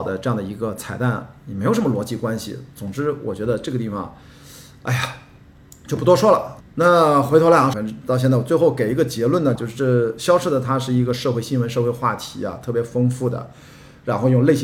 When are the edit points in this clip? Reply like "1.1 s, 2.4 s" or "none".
6.6 s, 7.7 s, 9.6 s